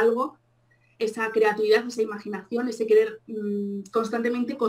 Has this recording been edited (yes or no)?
no